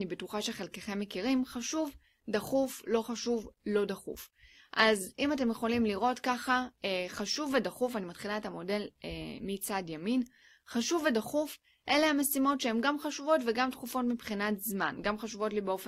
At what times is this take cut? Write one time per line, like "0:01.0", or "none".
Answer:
none